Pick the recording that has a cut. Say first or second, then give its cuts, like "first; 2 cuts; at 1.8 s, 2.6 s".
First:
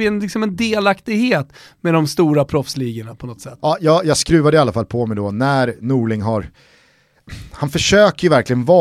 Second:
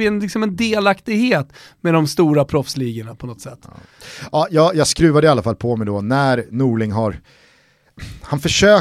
first; 1 cut; at 3.6 s